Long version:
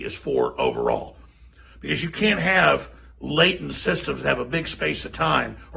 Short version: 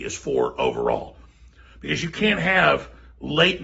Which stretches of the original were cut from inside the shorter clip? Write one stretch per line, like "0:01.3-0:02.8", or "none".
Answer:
none